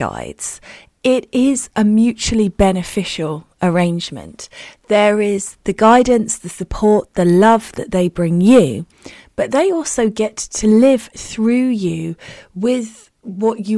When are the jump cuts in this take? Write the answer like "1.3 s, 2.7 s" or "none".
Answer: none